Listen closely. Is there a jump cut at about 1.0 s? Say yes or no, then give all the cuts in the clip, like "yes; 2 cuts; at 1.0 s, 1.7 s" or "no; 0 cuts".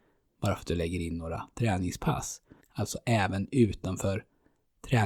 no; 1 cut; at 2.6 s